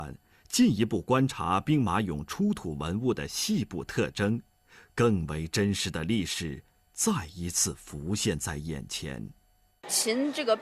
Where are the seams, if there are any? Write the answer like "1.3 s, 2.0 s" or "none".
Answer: none